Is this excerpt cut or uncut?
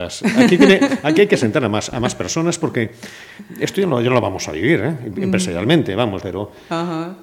cut